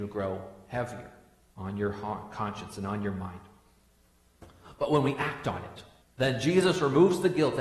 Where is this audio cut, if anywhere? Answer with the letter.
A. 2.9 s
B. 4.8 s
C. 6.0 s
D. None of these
C